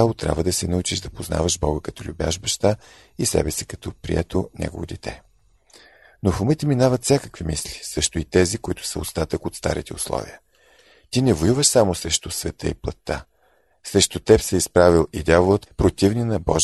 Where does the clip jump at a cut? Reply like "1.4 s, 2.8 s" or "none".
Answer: 15.7 s